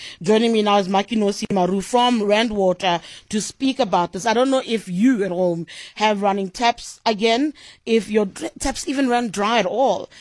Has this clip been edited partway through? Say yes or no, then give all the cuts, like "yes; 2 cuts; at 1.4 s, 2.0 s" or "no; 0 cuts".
no; 0 cuts